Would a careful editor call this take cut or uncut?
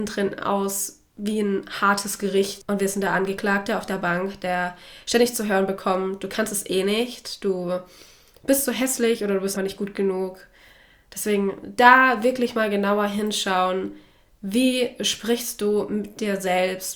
cut